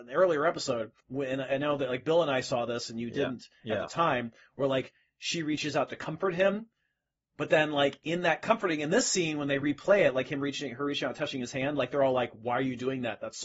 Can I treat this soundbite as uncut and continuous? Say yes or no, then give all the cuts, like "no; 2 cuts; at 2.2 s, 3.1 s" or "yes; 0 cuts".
no; 1 cut; at 1.0 s